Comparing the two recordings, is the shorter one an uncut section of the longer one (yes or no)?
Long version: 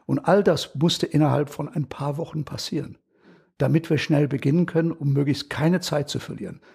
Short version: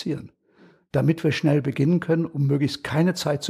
yes